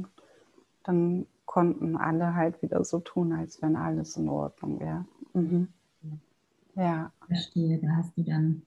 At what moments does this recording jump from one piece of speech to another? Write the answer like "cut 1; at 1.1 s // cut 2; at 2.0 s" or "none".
none